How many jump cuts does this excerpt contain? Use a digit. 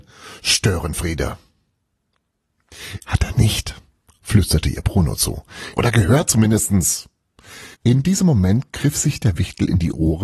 3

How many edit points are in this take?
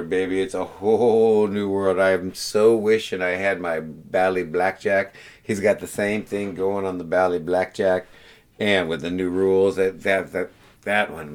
0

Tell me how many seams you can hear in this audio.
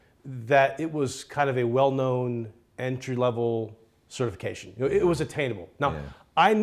0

